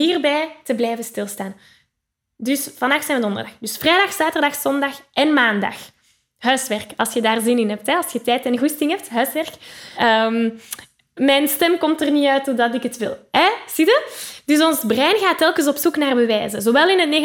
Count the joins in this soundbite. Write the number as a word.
one